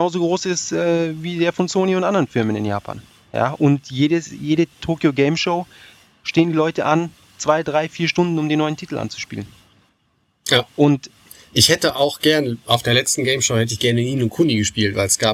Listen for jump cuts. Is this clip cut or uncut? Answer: uncut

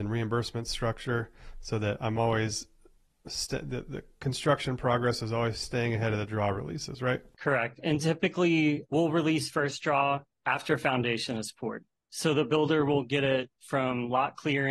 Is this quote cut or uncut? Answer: uncut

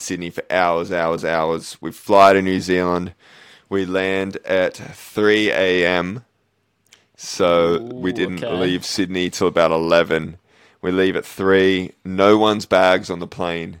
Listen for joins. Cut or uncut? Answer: uncut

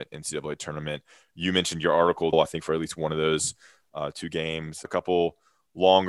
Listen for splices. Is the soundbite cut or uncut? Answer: cut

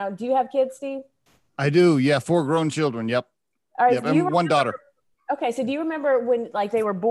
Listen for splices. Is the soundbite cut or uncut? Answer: uncut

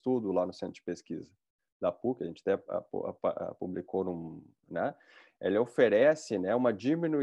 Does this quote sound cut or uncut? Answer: cut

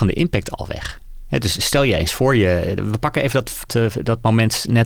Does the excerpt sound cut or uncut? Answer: cut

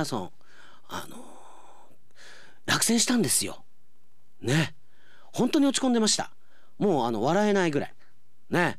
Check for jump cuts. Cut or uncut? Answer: uncut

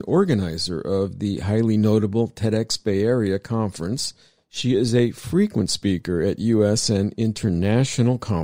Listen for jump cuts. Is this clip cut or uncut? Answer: uncut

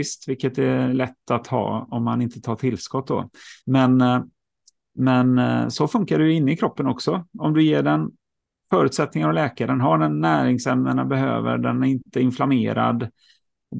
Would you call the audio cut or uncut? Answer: cut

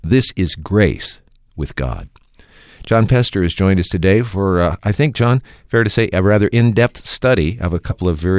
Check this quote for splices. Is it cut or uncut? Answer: uncut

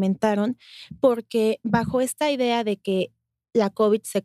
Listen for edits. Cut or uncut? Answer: uncut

